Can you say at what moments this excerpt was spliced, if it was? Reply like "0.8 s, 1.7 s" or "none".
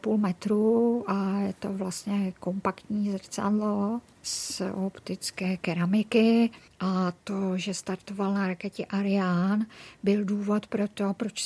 6.7 s